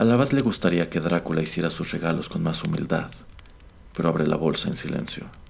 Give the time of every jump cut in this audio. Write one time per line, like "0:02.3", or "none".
none